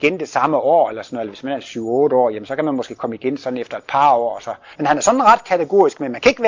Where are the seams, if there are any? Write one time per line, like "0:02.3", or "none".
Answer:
0:04.7

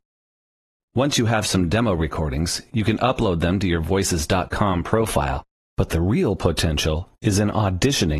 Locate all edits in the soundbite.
none

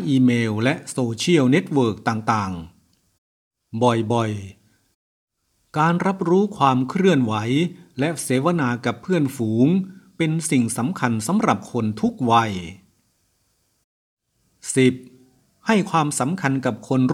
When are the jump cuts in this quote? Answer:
none

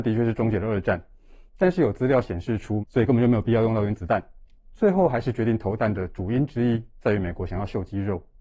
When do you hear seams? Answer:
0:02.8

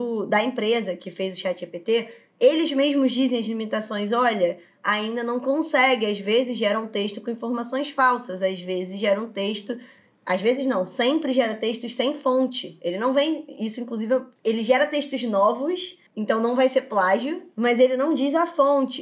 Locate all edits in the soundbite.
none

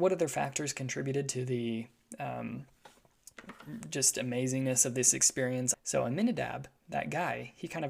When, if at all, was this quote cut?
0:05.7

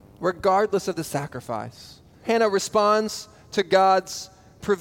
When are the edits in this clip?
0:02.2

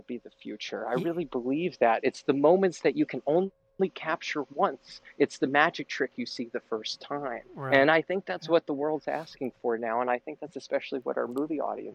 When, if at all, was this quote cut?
none

